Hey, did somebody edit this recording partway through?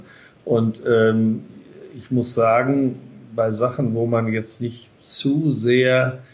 no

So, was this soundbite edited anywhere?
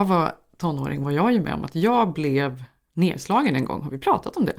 no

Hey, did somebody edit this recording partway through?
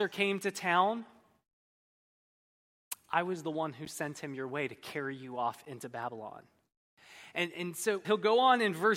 yes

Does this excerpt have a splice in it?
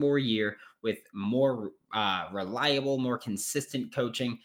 no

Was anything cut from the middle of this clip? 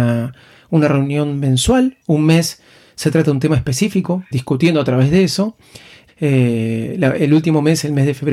yes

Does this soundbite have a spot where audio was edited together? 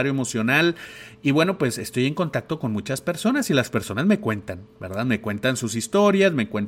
no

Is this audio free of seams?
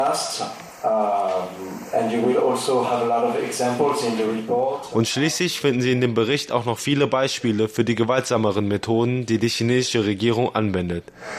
yes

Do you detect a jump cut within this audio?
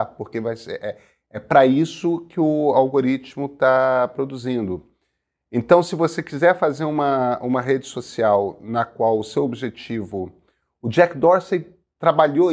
no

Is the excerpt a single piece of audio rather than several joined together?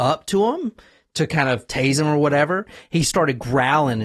yes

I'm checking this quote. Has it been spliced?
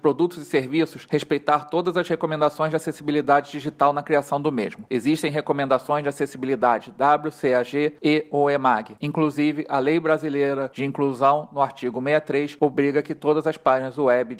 no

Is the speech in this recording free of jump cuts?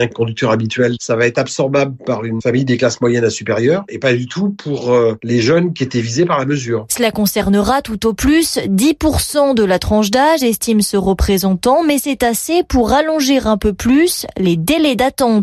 yes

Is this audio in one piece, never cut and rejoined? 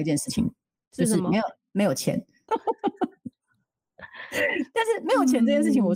no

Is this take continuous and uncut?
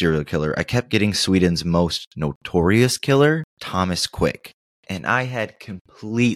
no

